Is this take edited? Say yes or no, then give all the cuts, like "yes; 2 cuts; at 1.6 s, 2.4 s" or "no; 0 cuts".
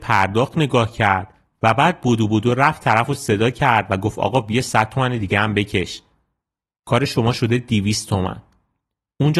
no; 0 cuts